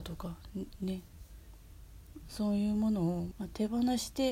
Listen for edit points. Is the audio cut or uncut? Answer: cut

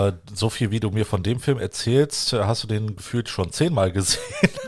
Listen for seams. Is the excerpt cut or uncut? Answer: uncut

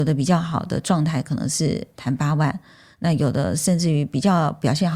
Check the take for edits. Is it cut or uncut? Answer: uncut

